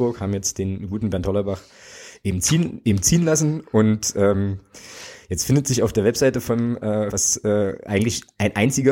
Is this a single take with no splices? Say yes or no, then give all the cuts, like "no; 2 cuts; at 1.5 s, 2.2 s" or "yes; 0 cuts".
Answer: no; 1 cut; at 7.1 s